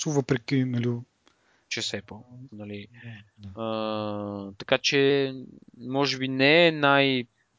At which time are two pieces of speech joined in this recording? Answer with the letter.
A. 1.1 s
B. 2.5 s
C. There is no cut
B